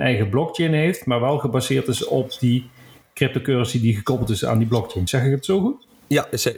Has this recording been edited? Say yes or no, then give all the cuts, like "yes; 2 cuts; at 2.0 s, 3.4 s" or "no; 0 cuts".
no; 0 cuts